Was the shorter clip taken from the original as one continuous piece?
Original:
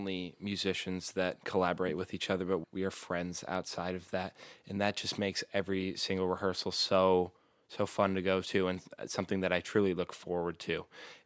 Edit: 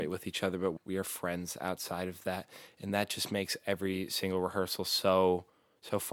yes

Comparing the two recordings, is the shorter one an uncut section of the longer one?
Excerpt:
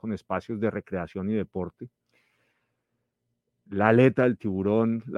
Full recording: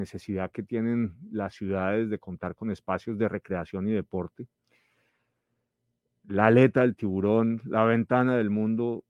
yes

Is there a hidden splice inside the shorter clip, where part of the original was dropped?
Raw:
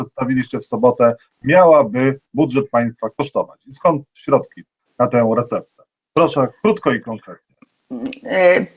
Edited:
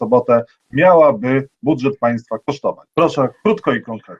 yes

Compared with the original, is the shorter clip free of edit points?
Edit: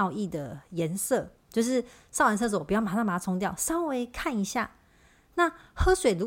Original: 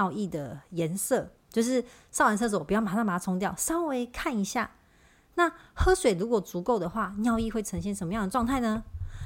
yes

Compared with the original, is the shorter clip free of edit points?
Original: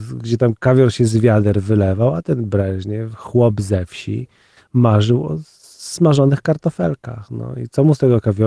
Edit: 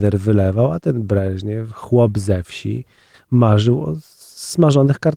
yes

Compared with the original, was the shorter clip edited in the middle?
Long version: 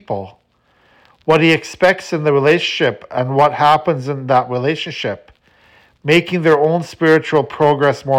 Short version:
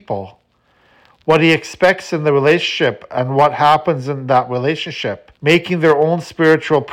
yes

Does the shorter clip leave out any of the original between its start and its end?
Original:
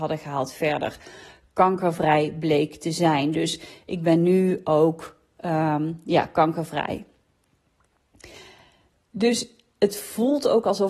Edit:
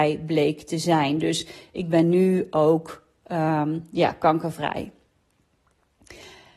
no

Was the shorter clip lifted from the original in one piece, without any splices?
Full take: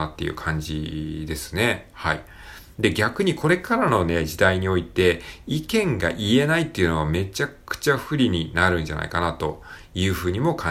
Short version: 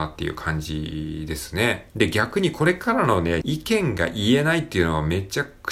no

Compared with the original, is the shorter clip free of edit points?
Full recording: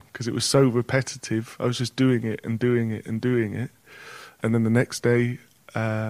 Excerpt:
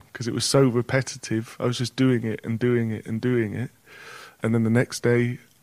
yes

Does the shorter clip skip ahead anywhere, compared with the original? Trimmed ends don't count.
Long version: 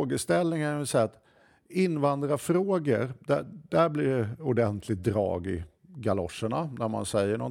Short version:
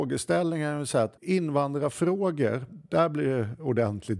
yes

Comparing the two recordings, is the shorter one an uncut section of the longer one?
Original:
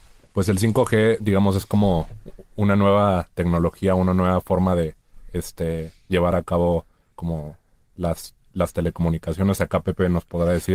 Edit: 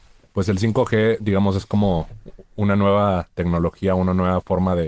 yes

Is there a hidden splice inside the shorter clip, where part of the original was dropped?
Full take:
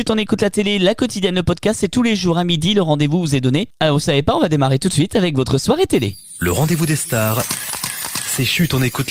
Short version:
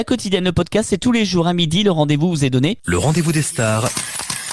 yes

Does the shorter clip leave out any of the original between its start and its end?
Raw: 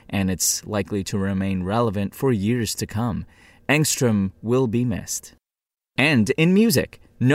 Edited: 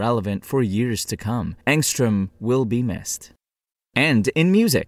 yes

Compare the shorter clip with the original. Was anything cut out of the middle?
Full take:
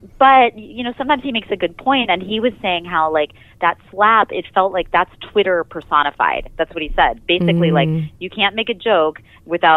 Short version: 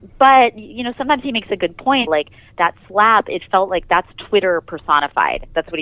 yes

